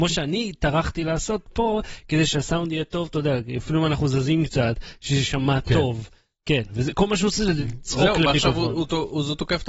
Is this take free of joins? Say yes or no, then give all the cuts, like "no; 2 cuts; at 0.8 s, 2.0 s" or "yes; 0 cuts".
yes; 0 cuts